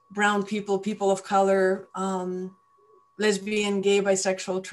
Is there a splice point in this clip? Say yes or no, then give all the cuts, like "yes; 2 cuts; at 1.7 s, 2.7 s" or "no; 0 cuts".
no; 0 cuts